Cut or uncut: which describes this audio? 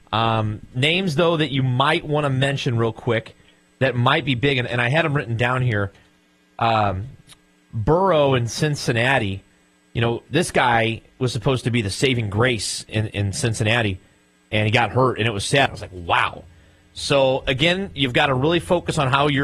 cut